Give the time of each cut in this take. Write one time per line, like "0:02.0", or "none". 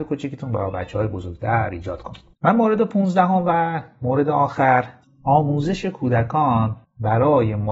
0:02.3